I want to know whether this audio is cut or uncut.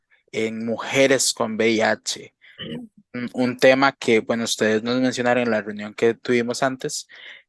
uncut